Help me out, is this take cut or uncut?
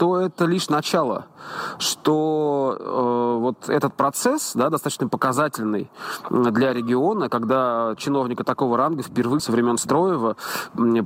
cut